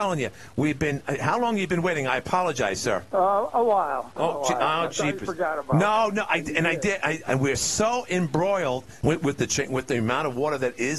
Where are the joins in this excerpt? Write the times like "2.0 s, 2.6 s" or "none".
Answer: 3.1 s, 7.2 s, 9.0 s